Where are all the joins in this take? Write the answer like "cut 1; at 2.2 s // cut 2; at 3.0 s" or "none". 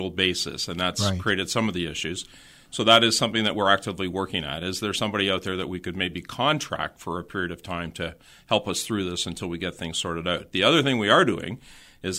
none